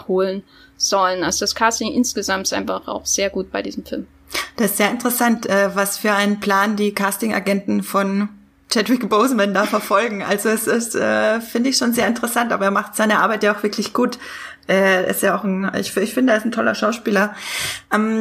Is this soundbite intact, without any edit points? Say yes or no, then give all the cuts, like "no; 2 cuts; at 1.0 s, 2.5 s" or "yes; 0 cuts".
yes; 0 cuts